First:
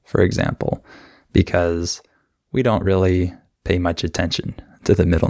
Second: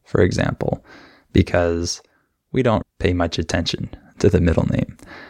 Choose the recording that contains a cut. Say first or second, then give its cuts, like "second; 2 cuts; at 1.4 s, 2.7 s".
second; 1 cut; at 2.8 s